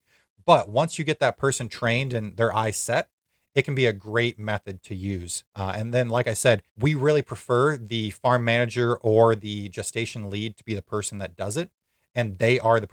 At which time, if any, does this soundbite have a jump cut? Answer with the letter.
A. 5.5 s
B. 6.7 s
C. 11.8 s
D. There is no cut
B